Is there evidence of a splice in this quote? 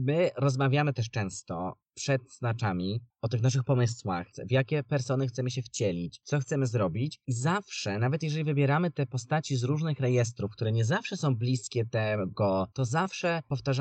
yes; 1 cut; at 12.7 s

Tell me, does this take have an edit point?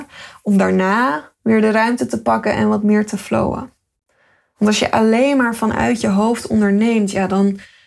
no; 0 cuts

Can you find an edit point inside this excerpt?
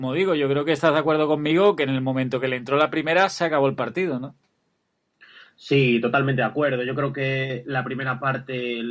no; 0 cuts

